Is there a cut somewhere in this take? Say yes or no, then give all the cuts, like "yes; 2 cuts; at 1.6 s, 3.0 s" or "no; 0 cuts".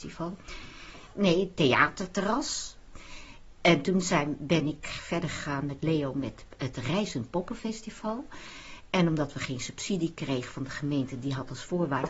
yes; 1 cut; at 1.1 s